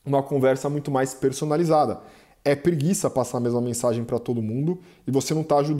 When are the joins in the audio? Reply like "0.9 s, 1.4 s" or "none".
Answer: none